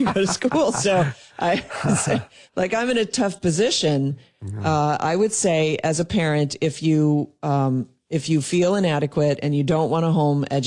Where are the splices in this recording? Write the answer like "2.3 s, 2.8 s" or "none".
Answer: none

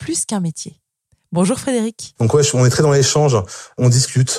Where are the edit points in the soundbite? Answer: 2.2 s

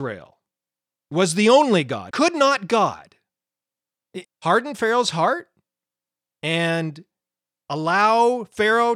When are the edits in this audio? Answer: 2.1 s, 4.2 s

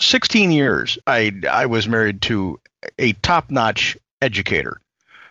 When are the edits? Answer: 1.0 s

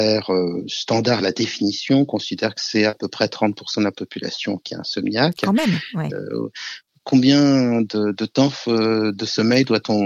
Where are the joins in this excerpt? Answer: 6.1 s

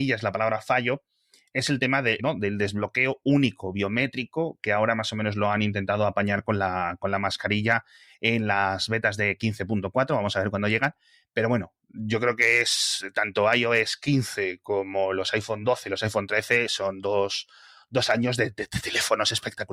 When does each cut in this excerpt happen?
2.2 s

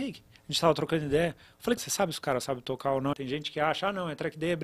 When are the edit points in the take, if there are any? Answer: 1.8 s, 3.1 s

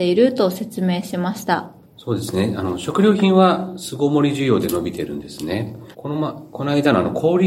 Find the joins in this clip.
1.8 s, 5.9 s

